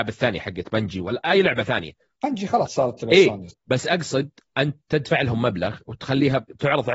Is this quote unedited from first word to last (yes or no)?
no